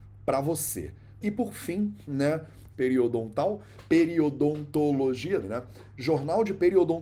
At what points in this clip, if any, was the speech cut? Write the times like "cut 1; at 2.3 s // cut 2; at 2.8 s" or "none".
cut 1; at 1.2 s // cut 2; at 2.7 s // cut 3; at 5.4 s